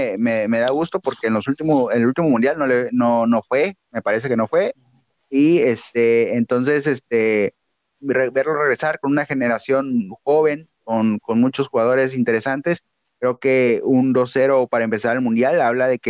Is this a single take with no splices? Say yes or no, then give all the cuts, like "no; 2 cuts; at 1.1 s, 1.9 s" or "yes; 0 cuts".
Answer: yes; 0 cuts